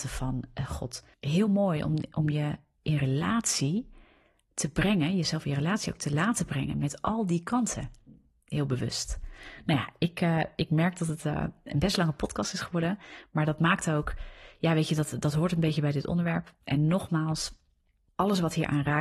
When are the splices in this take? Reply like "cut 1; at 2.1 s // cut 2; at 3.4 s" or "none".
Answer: none

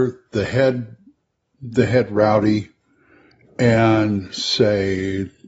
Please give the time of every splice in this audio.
none

